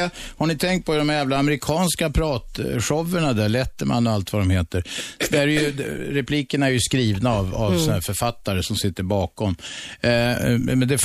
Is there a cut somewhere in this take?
no; 0 cuts

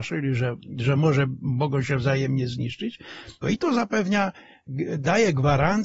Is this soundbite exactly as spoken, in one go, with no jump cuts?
no; 1 cut; at 3.4 s

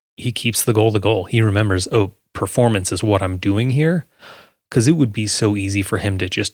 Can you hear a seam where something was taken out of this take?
no; 0 cuts

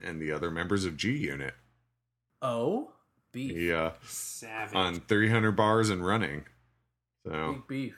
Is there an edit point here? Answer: no; 0 cuts

